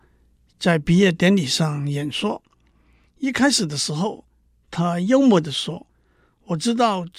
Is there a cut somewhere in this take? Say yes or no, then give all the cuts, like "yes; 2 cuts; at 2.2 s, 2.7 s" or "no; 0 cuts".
no; 0 cuts